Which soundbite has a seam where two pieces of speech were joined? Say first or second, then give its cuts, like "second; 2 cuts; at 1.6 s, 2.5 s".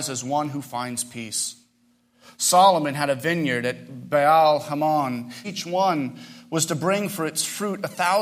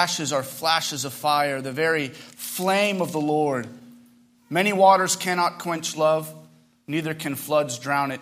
first; 1 cut; at 5.4 s